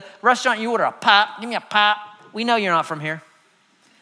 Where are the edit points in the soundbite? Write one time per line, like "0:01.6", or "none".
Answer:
none

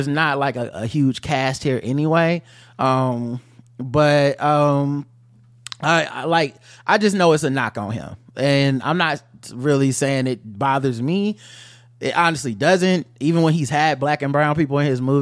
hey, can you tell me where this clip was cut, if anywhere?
none

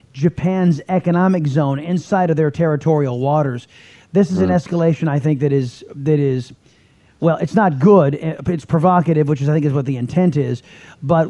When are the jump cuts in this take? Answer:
none

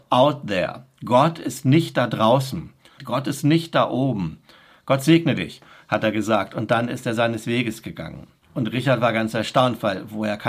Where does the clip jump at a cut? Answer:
0:03.0
0:08.4

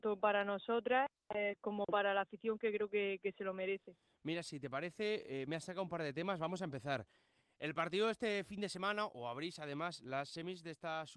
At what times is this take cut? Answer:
none

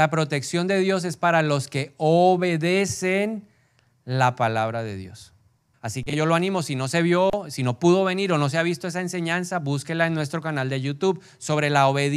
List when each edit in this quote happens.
0:05.7

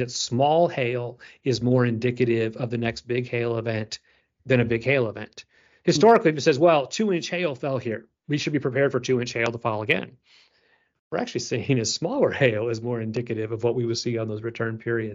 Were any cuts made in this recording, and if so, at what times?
none

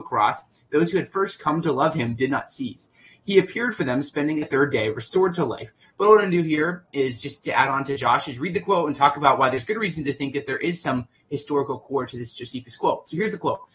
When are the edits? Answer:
0:05.9

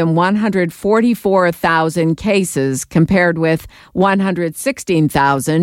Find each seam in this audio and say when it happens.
none

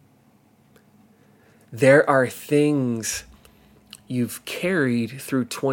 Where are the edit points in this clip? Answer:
none

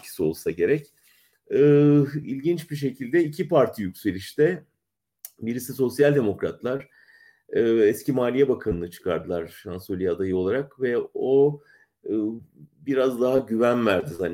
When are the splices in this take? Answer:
none

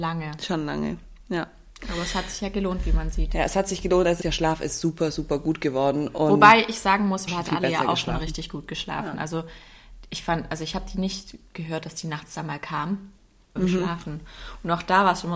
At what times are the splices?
0:04.2
0:07.3
0:13.6

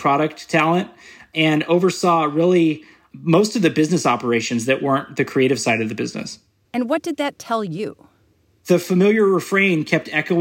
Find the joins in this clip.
0:06.7

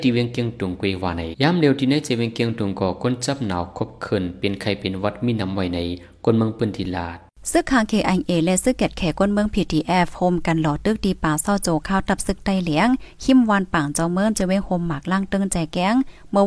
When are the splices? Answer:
0:01.3

